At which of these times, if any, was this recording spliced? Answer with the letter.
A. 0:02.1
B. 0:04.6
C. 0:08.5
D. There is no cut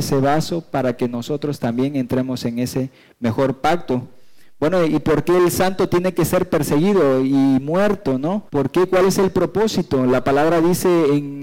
C